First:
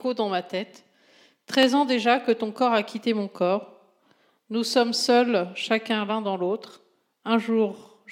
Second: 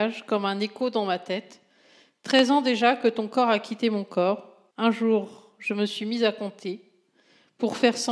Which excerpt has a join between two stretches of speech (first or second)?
second